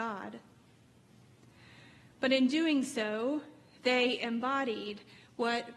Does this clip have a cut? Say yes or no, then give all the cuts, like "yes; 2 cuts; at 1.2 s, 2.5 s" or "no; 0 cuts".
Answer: no; 0 cuts